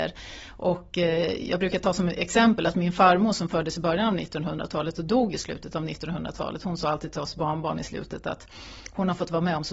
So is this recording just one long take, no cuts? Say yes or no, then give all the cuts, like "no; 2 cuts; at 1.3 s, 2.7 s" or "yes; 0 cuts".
yes; 0 cuts